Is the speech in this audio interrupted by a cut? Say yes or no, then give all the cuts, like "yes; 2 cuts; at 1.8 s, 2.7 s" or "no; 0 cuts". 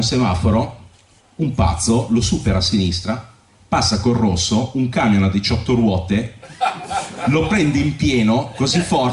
no; 0 cuts